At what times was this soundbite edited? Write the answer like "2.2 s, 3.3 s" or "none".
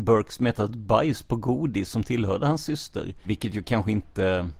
3.2 s